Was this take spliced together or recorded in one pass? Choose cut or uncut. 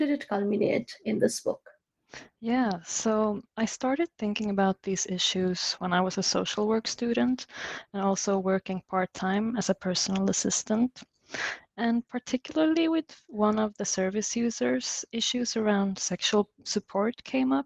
uncut